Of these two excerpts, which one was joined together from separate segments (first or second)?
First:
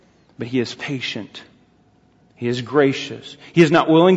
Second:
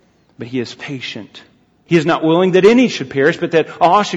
second